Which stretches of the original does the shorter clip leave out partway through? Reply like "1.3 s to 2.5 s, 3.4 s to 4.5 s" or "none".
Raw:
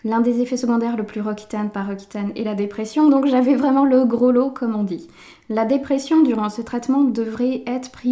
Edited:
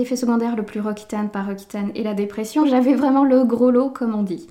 3.0 s to 3.2 s